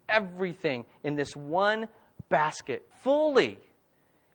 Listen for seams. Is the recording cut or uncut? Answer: cut